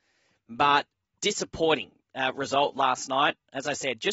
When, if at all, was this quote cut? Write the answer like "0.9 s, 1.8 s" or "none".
1.1 s